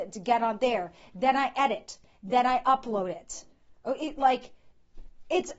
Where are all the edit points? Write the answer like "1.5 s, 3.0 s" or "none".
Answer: none